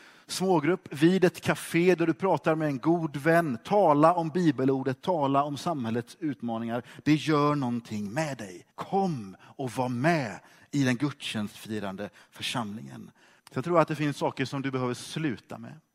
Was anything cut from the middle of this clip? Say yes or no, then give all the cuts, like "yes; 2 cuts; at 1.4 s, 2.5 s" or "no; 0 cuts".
yes; 2 cuts; at 8.7 s, 13.4 s